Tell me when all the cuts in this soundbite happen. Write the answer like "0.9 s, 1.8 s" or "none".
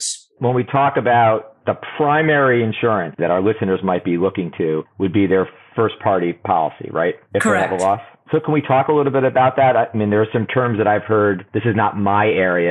none